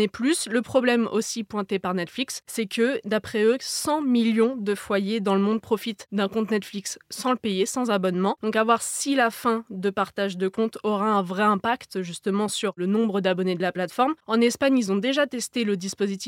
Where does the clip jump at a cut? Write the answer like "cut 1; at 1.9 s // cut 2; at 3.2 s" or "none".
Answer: cut 1; at 8.4 s